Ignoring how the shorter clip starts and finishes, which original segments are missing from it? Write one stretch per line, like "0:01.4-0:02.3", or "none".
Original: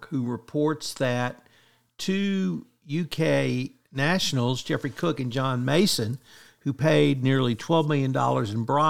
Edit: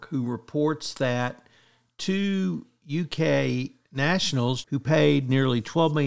0:04.6-0:06.6